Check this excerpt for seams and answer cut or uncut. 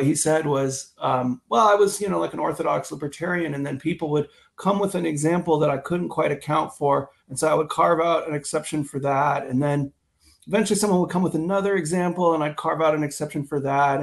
uncut